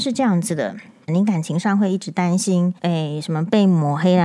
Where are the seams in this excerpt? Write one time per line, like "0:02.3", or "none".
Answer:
0:01.1
0:02.8